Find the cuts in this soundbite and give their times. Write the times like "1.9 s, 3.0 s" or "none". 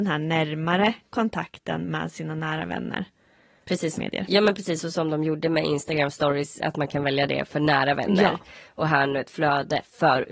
4.0 s